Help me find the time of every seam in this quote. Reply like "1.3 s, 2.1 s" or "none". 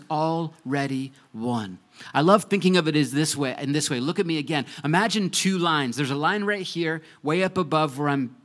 none